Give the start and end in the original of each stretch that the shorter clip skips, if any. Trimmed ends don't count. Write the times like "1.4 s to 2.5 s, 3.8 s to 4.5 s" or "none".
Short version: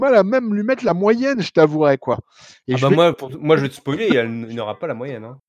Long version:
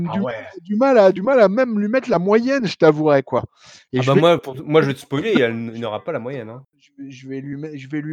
none